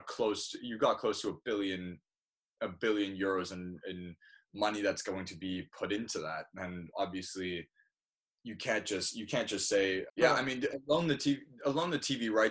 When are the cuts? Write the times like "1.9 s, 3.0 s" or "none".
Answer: 10.1 s, 11.6 s